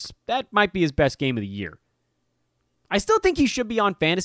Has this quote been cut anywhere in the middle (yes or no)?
no